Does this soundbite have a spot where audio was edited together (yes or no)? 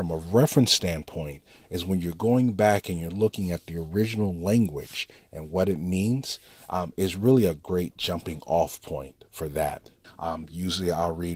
yes